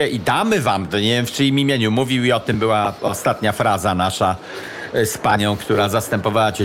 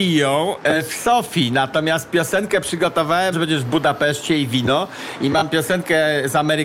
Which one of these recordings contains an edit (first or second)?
second